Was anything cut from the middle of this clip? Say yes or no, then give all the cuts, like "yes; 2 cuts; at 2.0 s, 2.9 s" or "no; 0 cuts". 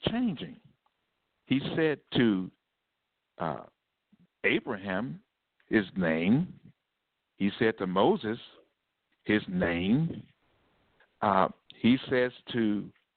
no; 0 cuts